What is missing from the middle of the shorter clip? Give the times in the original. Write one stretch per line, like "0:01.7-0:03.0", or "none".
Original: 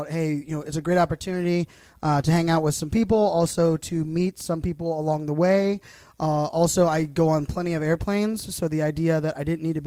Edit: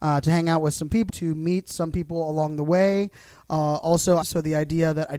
0:03.1-0:03.8
0:06.9-0:08.5